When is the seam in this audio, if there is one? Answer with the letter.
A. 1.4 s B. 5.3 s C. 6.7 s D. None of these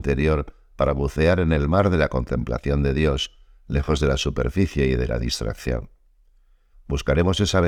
C